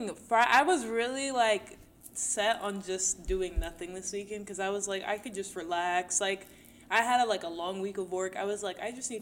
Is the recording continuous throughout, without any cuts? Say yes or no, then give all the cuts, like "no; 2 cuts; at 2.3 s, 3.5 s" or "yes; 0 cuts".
yes; 0 cuts